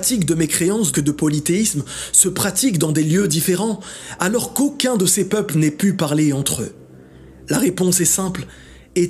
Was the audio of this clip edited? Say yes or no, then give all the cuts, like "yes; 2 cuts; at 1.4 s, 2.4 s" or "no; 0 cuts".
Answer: yes; 1 cut; at 0.9 s